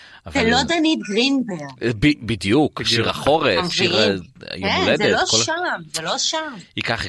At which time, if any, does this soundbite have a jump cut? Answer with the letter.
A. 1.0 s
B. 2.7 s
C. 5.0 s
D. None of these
D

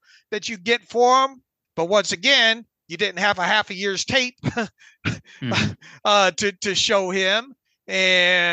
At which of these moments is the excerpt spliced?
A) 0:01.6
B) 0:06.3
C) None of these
A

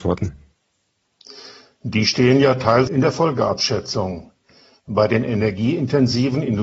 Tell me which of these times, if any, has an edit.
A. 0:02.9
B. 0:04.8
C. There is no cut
A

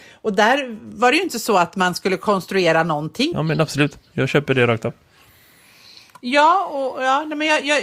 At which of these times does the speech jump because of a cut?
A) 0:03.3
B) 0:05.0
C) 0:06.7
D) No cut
A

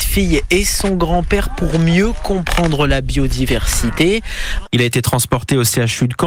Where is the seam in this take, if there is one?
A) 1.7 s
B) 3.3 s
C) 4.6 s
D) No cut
C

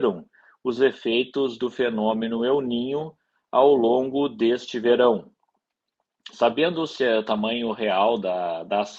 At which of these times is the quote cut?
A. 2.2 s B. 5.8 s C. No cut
C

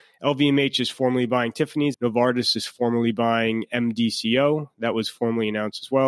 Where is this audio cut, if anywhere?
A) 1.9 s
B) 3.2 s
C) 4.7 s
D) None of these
A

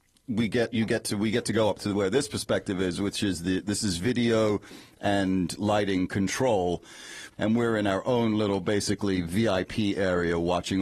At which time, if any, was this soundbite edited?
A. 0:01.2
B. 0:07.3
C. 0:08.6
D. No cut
B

